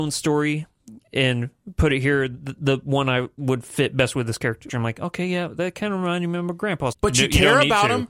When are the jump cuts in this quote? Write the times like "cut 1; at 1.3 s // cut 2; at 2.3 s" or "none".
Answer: cut 1; at 4.7 s // cut 2; at 6.9 s